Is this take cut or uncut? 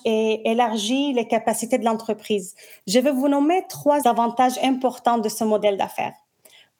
uncut